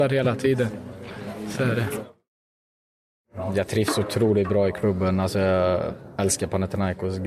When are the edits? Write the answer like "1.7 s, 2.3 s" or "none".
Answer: none

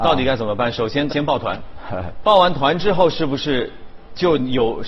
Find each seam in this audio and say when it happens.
1.1 s

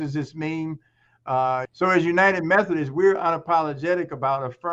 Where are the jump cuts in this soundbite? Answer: 1.7 s

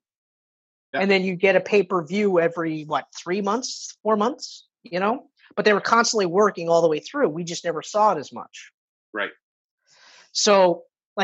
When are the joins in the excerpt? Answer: 0.9 s

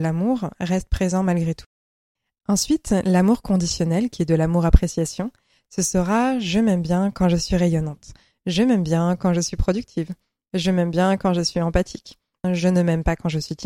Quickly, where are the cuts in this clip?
12.4 s

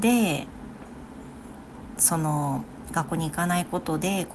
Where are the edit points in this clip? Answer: 2.0 s

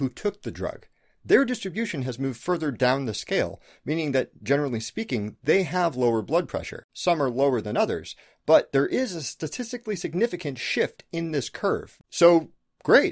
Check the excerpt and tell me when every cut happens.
none

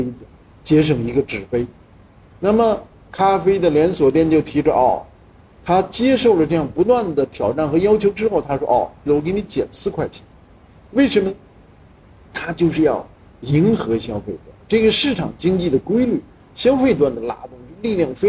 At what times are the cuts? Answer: 9.1 s

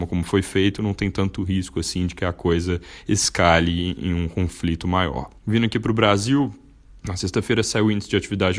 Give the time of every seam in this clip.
5.4 s

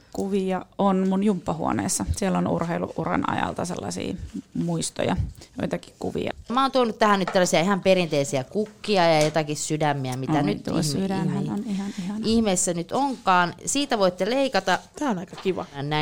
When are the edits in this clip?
none

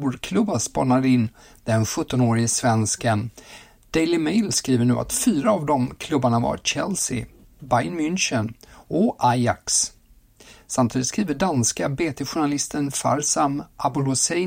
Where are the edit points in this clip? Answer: 7.4 s

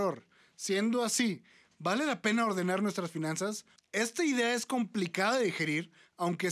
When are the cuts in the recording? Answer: 3.8 s

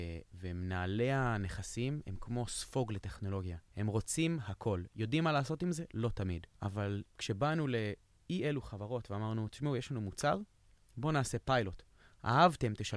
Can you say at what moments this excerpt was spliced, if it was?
3.7 s

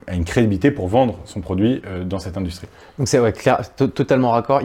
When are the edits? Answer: none

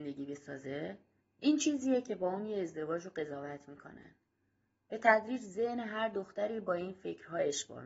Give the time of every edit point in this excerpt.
1.2 s

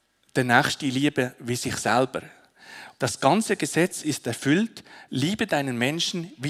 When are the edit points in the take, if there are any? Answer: 3.0 s, 5.1 s

